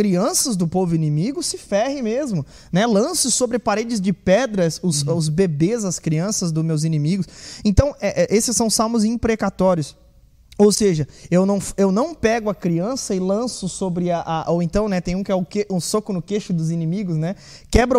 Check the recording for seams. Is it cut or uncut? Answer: uncut